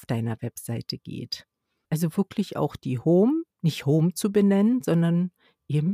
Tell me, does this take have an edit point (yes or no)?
yes